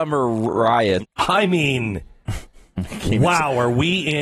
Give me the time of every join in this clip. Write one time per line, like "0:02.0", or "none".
0:01.0